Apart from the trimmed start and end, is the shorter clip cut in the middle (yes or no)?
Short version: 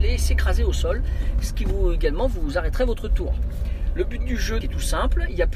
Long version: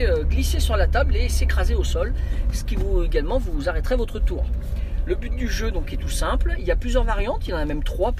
yes